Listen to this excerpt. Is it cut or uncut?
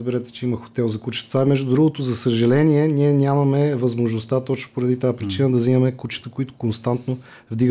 uncut